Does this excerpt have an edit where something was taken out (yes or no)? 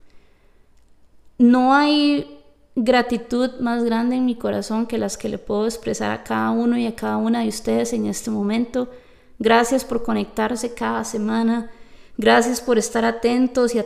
no